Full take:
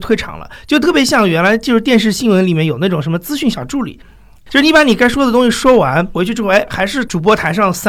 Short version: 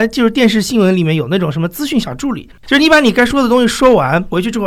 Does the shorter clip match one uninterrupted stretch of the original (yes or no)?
no